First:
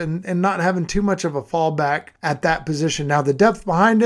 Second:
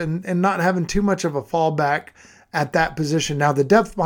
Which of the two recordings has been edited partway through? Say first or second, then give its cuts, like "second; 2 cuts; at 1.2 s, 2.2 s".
first; 1 cut; at 2.2 s